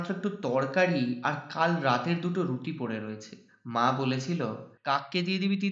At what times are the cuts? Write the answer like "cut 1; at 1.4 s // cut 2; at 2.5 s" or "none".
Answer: cut 1; at 4.8 s